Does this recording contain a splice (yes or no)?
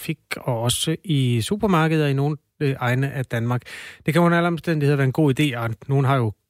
no